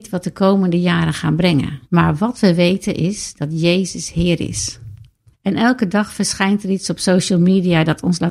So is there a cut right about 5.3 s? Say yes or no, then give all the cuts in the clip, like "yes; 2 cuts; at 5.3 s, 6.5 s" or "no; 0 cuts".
yes; 2 cuts; at 1.8 s, 5.3 s